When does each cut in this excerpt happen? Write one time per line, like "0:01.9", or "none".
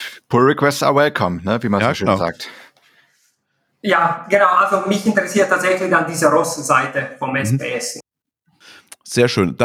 none

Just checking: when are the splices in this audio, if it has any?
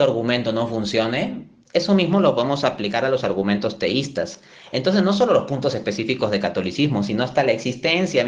none

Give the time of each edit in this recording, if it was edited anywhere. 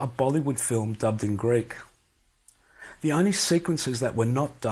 none

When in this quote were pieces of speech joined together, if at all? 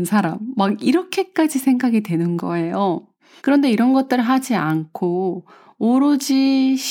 0:03.4

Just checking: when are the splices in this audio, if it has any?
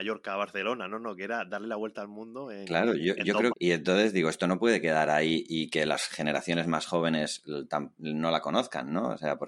0:03.5

